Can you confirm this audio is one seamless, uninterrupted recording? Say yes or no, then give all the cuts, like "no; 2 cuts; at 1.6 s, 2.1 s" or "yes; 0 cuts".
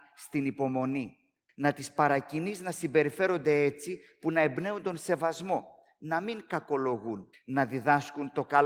no; 2 cuts; at 1.5 s, 7.3 s